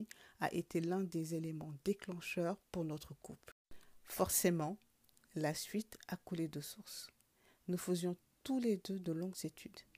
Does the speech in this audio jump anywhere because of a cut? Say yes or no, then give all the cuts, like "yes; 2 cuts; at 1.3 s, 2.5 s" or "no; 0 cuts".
no; 0 cuts